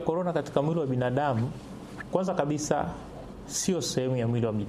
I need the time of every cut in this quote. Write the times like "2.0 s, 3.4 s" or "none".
none

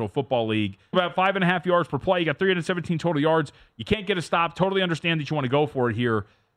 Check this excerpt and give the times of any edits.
0.9 s

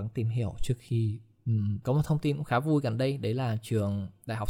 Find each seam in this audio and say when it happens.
1.8 s

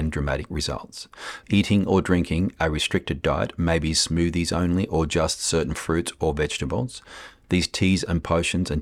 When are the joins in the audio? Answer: 1.4 s, 7.4 s

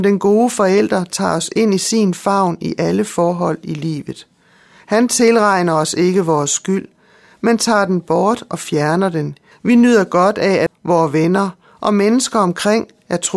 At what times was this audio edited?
9.5 s, 10.7 s

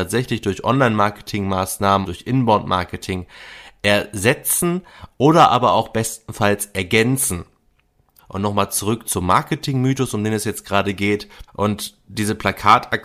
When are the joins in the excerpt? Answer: 2.0 s, 8.2 s, 11.5 s

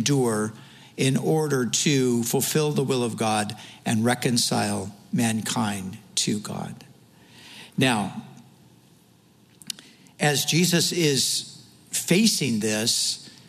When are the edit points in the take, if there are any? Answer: none

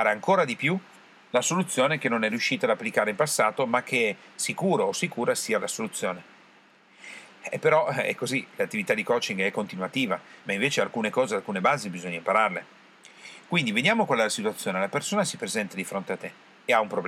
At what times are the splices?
7.2 s, 10.4 s

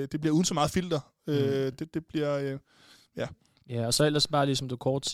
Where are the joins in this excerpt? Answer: none

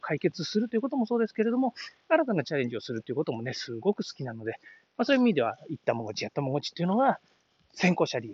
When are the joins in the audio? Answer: none

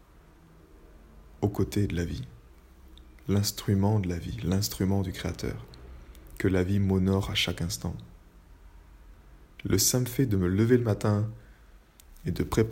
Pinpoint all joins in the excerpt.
9.6 s

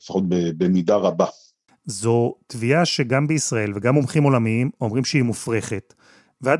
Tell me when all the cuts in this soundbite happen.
1.7 s

